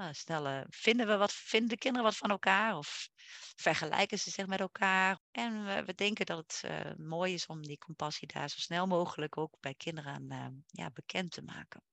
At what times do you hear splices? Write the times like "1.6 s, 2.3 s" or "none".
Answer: 5.2 s

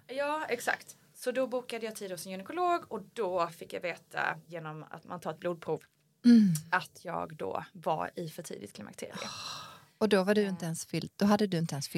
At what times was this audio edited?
4.5 s

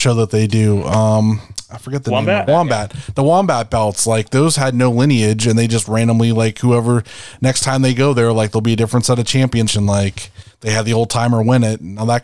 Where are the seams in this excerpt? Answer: 2.5 s, 9.7 s

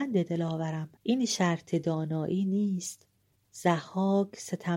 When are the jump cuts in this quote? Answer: 1.0 s, 3.4 s

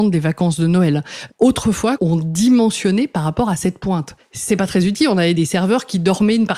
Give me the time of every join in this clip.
2.0 s

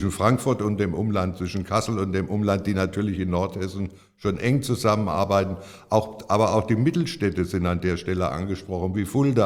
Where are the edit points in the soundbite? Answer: none

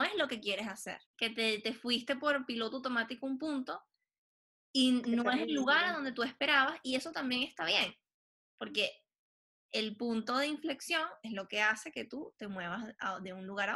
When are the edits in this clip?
1.1 s

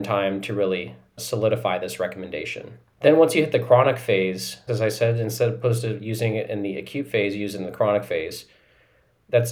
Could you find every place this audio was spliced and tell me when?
4.7 s

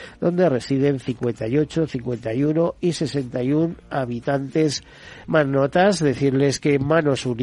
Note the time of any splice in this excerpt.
5.2 s

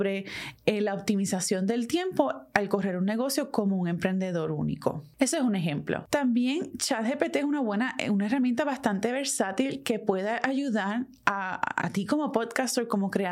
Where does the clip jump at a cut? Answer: 11.8 s

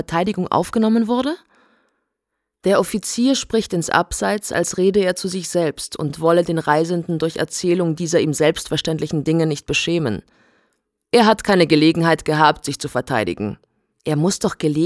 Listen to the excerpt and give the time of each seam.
13.9 s

